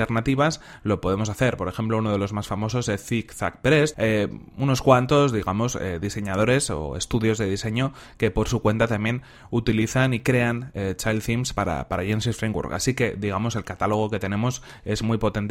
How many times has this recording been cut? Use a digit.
1